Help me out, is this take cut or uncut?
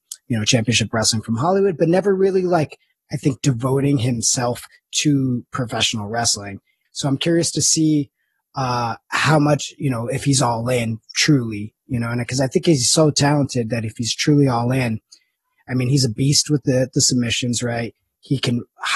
cut